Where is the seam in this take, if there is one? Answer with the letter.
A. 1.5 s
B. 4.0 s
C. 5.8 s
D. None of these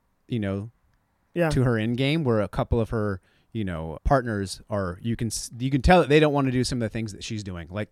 B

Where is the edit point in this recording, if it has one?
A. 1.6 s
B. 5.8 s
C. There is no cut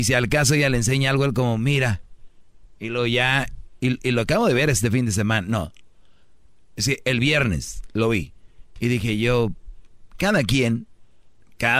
C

